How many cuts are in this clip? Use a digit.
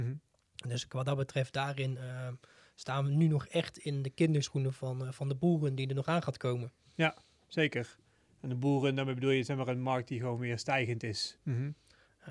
1